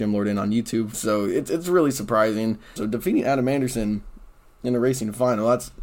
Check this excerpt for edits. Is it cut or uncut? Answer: cut